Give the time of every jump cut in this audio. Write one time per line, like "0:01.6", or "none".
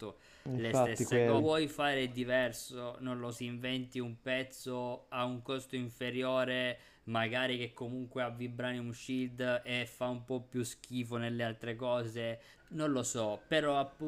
0:01.4
0:03.3
0:12.6